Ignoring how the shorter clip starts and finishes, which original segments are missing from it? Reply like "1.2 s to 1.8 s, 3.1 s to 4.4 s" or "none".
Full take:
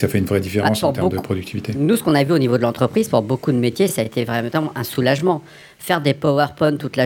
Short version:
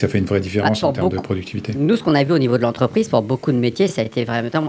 none